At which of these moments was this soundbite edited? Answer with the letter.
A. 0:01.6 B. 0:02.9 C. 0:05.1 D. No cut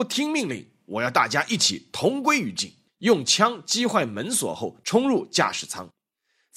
B